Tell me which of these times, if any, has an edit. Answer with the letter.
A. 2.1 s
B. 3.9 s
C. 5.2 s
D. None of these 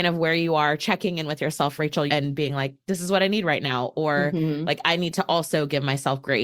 A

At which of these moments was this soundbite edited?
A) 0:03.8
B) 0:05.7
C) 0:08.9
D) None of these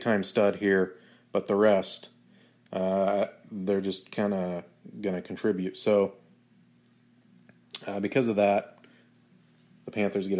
D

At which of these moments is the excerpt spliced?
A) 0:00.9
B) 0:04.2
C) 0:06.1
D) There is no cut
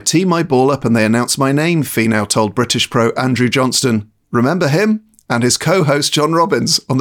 B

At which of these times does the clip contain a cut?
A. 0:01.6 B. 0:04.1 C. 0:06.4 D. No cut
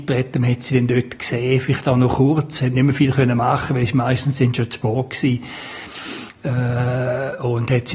D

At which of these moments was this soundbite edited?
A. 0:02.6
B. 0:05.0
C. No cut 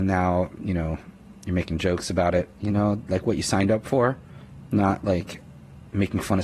A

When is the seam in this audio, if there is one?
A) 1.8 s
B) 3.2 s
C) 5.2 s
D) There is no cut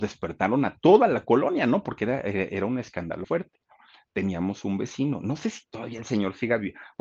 B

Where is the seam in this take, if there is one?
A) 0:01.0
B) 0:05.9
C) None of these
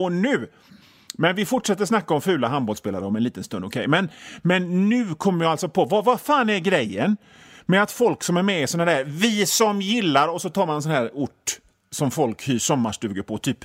C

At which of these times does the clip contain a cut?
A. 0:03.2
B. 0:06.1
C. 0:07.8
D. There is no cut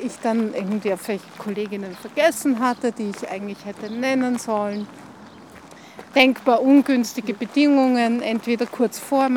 B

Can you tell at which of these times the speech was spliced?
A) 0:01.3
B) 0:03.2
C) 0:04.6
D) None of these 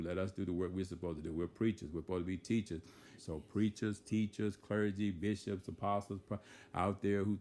B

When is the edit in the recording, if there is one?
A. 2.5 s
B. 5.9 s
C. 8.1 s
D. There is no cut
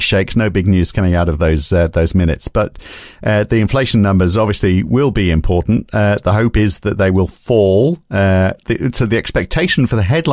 D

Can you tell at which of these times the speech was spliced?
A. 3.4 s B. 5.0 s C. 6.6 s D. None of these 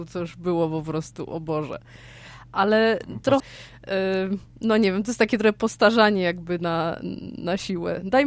A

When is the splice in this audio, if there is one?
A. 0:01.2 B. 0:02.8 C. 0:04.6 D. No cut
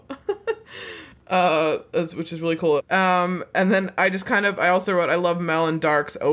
B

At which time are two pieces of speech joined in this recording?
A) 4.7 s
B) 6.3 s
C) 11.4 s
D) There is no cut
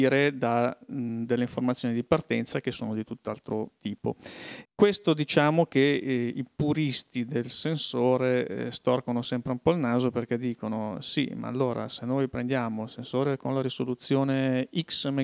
A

